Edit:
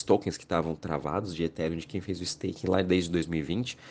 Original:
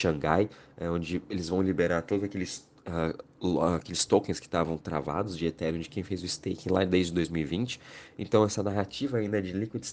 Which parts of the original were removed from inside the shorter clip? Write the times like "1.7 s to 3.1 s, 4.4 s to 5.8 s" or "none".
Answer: none

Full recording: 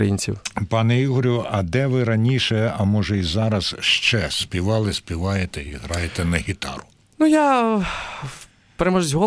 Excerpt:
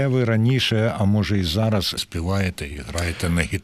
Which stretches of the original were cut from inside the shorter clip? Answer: 3.8 s to 4.9 s

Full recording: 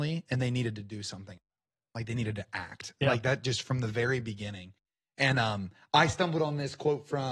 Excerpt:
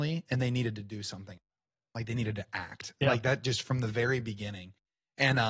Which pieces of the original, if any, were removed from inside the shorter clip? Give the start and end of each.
none

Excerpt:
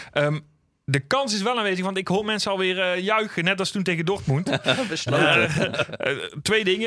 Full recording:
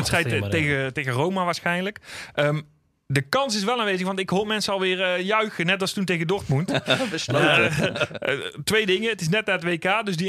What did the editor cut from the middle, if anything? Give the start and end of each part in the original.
none

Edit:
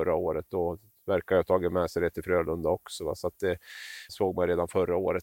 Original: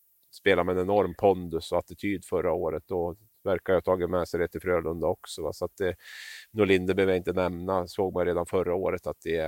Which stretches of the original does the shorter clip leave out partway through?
6.5 s to 7.9 s

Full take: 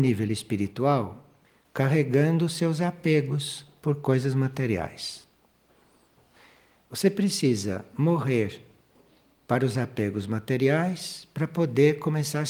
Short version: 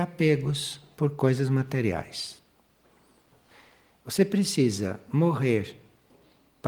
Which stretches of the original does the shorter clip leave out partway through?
none

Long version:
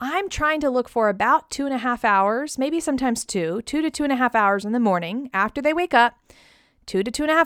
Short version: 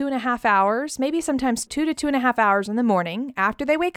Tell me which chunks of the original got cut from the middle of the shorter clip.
3.3 s to 3.6 s

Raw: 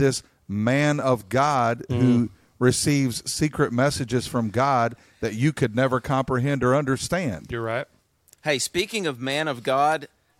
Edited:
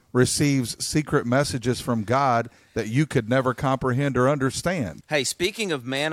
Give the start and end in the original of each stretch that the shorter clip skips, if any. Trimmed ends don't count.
7.5 s to 8.4 s

